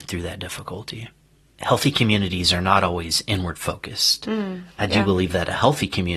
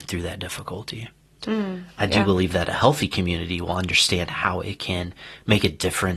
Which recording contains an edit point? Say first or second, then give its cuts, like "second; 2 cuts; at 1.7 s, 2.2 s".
second; 1 cut; at 1.4 s